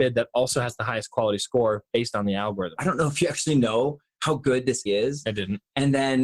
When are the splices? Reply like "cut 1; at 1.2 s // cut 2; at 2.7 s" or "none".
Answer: cut 1; at 2.8 s // cut 2; at 4.9 s